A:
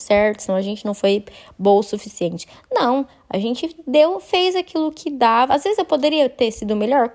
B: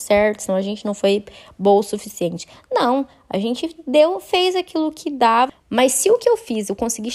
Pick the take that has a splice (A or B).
B